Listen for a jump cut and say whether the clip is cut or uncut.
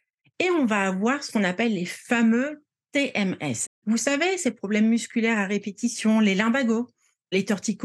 cut